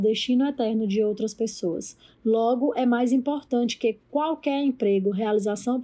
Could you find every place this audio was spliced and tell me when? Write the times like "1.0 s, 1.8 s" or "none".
none